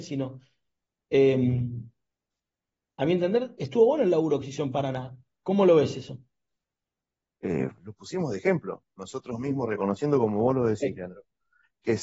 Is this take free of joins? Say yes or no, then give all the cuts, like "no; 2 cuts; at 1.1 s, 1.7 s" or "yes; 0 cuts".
yes; 0 cuts